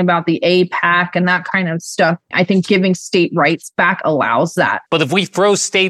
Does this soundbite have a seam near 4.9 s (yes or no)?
yes